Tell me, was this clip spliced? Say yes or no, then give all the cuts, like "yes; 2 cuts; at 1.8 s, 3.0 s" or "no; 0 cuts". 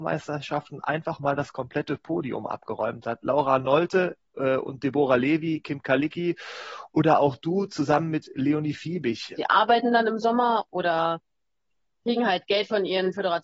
yes; 1 cut; at 9.4 s